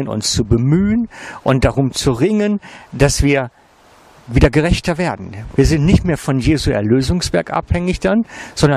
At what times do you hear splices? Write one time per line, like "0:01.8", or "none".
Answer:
0:05.5